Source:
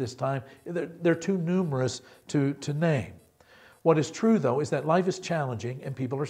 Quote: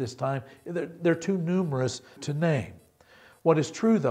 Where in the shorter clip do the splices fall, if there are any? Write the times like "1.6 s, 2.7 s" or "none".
2.2 s